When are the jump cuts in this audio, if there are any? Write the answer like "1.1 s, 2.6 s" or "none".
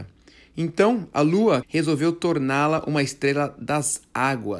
1.6 s